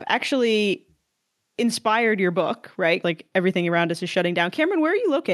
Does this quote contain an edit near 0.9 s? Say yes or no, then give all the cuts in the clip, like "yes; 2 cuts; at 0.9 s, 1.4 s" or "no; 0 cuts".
no; 1 cut; at 3.0 s